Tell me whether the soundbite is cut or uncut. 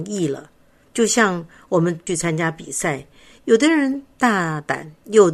uncut